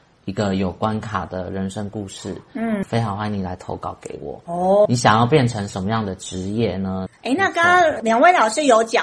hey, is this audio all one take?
no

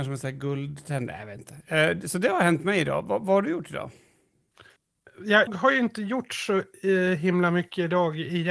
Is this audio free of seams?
no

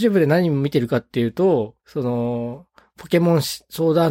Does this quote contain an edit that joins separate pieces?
yes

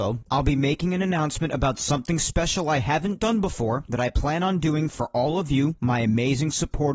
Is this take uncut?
yes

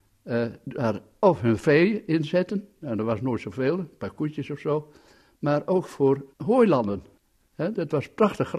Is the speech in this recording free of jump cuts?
yes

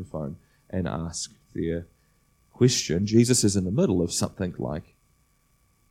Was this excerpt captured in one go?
yes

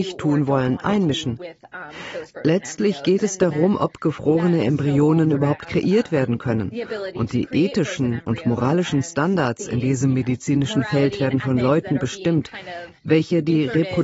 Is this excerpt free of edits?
yes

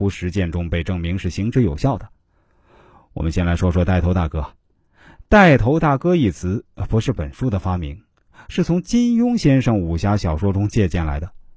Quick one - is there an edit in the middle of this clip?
no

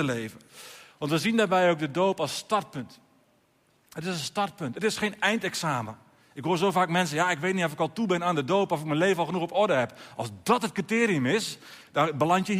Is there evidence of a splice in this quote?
no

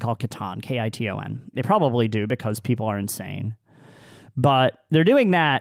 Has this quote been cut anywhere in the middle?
yes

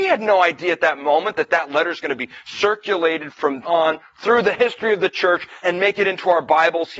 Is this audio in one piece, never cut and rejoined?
no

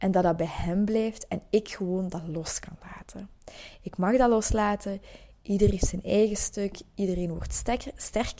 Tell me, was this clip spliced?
no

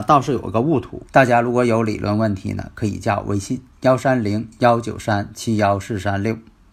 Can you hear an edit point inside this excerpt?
yes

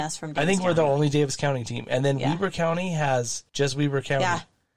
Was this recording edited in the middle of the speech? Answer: yes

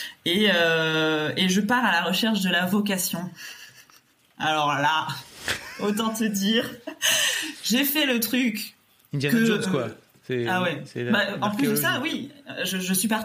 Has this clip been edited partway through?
no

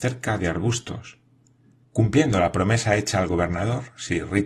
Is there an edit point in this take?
yes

